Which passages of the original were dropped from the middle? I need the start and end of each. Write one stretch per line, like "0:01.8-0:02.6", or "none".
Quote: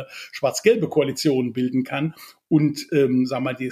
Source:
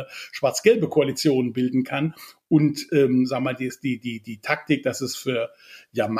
none